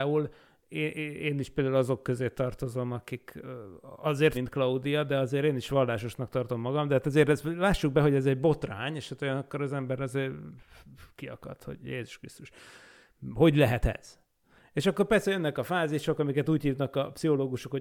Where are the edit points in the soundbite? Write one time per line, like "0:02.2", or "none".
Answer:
0:04.3